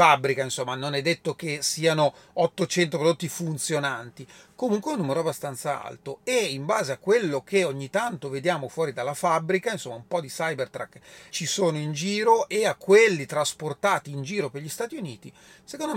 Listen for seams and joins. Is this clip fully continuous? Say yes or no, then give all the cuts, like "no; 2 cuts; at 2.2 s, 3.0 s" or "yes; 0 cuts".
no; 1 cut; at 11.3 s